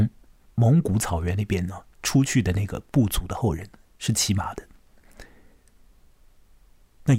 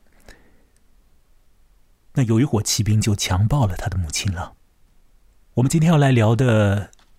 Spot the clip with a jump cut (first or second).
second